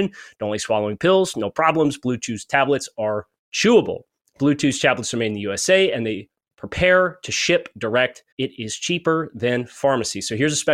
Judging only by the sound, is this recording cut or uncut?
cut